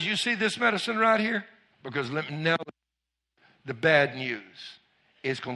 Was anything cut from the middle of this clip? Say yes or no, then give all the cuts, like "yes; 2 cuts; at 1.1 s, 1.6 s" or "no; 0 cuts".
yes; 1 cut; at 1.7 s